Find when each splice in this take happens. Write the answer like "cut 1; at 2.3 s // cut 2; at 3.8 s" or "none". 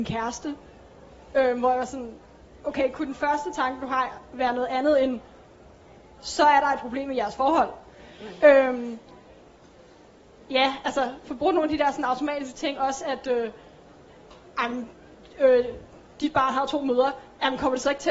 none